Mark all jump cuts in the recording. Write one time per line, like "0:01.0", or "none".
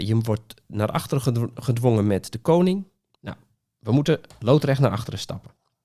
0:03.1